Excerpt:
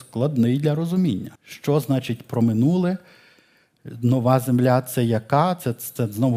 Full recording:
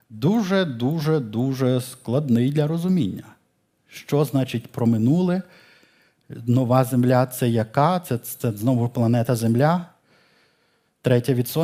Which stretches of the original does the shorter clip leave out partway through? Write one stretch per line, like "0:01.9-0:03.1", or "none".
0:03.3-0:03.8